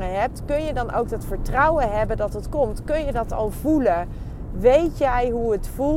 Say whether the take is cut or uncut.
uncut